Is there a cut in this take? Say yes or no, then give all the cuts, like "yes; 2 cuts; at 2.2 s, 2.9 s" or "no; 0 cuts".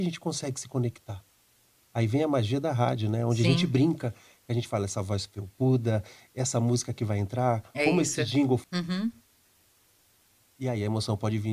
yes; 1 cut; at 8.6 s